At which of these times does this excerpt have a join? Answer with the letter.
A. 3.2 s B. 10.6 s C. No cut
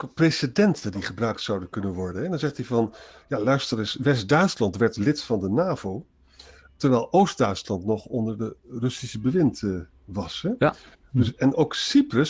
C